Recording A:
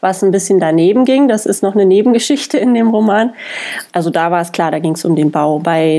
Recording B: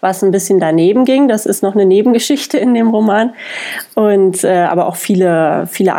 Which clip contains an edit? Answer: A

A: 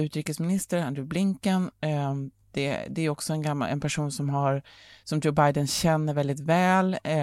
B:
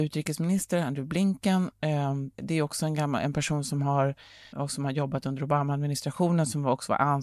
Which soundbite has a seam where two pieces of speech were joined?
B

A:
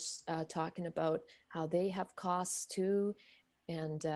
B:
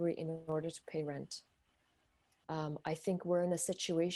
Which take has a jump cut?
B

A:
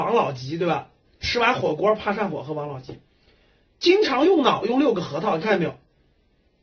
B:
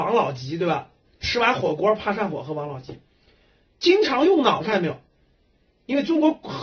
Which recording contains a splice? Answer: B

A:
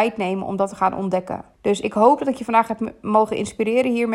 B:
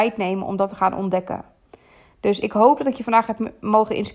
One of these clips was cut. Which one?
A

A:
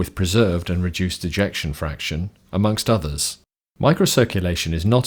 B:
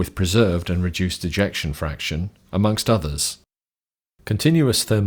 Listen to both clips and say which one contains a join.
A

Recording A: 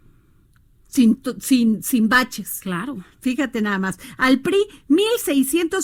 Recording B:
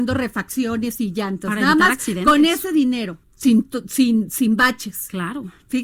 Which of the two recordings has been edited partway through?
B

